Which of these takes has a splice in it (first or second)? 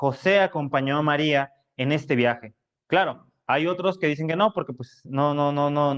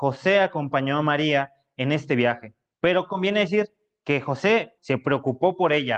second